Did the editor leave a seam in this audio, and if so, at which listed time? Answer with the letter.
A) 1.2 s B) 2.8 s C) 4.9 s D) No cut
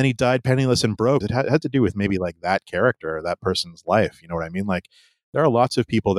A